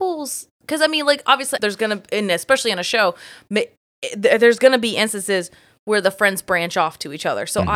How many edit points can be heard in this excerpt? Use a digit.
1